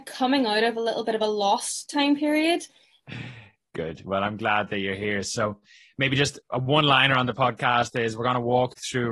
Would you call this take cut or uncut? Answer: cut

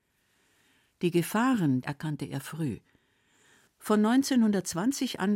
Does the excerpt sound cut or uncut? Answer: cut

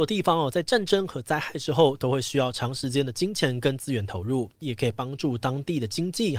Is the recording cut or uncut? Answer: cut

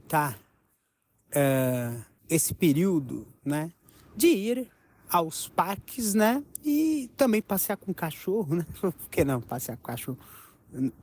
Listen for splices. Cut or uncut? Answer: cut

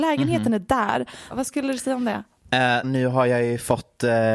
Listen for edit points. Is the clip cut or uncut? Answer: cut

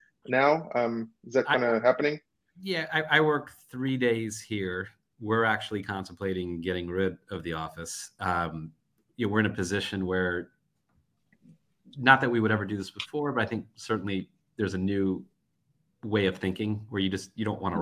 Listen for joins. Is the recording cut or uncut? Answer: uncut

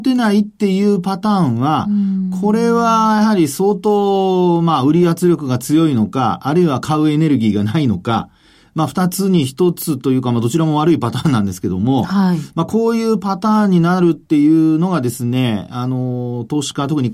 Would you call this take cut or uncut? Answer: uncut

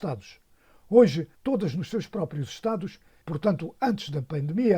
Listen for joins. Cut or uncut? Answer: cut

